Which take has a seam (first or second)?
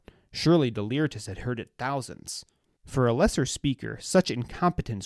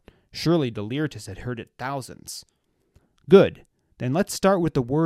first